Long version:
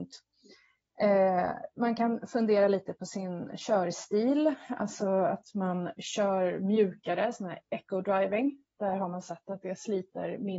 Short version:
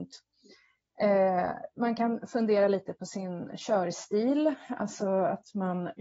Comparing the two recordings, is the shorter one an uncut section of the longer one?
yes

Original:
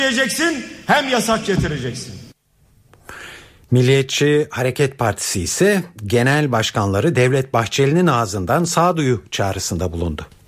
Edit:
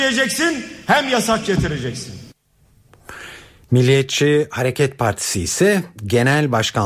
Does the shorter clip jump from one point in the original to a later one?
no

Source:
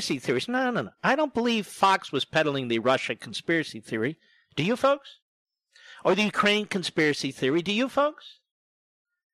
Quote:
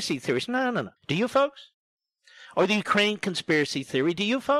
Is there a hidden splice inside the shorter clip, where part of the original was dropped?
yes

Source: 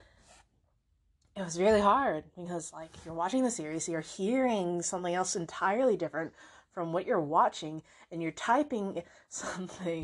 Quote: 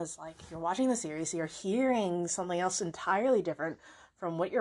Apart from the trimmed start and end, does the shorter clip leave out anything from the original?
no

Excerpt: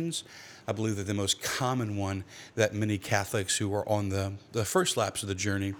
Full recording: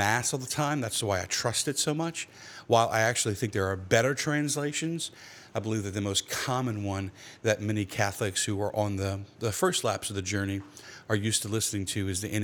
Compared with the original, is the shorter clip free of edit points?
yes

